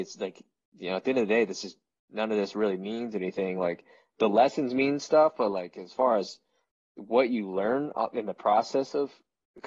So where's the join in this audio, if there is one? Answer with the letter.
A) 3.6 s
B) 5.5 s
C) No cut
C